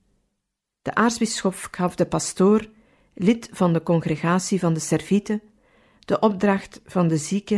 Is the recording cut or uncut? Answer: uncut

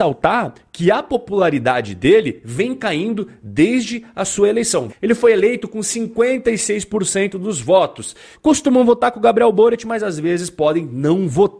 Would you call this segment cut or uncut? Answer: cut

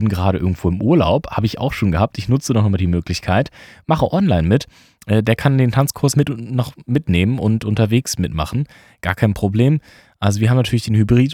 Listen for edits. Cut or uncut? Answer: cut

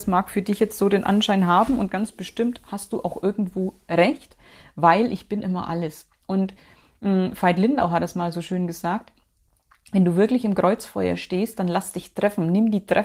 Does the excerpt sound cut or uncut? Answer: uncut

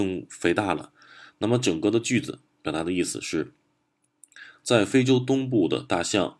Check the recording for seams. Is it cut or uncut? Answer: cut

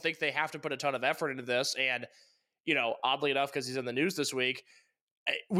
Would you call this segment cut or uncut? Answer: uncut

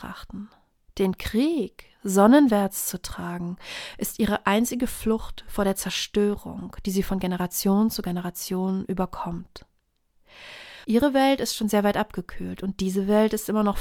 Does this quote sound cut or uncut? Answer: cut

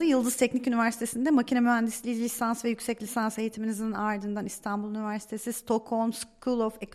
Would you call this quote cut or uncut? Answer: cut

